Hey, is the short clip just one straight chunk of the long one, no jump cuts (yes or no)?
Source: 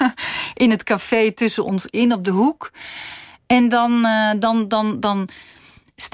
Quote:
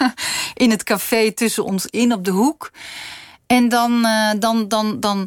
yes